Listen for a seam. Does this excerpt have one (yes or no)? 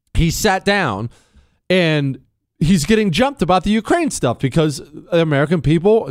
no